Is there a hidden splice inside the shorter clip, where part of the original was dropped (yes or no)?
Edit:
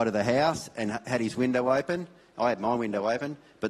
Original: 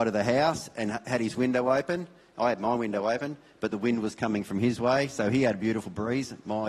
no